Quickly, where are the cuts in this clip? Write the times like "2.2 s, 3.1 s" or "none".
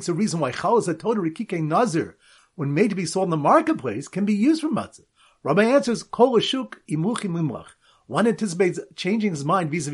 2.4 s